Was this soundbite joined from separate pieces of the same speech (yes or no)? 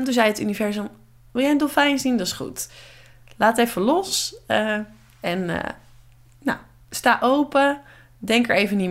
no